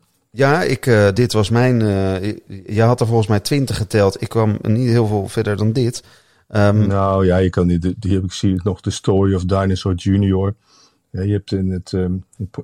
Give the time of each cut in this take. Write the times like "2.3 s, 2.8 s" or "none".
1.2 s